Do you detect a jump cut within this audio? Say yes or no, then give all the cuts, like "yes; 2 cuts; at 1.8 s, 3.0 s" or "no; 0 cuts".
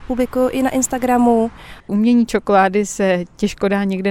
yes; 1 cut; at 1.8 s